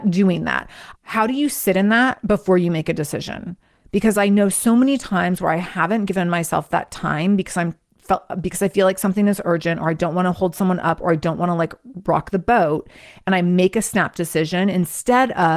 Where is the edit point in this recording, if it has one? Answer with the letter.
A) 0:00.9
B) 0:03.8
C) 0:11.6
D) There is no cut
A